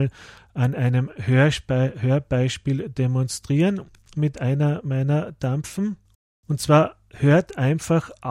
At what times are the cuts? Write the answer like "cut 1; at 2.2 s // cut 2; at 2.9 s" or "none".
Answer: none